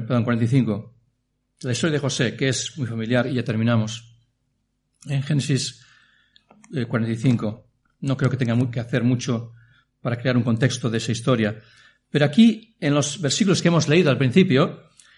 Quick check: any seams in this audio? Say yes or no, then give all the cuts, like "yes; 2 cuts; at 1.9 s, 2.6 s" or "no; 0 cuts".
no; 0 cuts